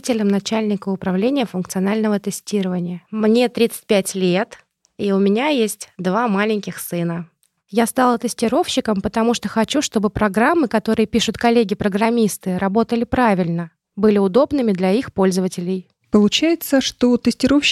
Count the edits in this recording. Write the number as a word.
zero